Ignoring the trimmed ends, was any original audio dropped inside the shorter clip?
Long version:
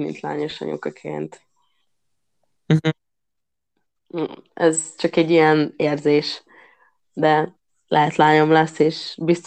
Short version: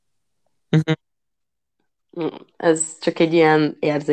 no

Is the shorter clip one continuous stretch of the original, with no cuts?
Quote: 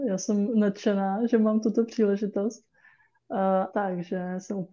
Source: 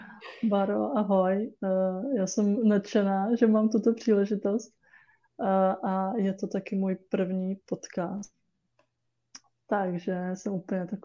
no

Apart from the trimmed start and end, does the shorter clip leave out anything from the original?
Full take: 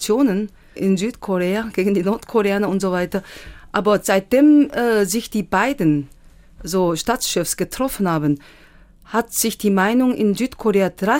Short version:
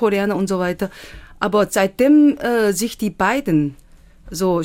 no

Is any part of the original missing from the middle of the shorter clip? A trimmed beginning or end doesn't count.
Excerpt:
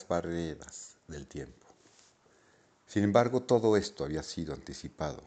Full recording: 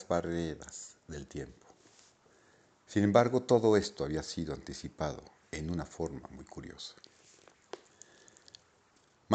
no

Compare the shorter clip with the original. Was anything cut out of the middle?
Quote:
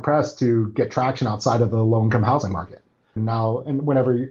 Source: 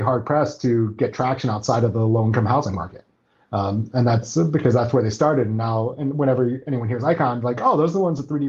yes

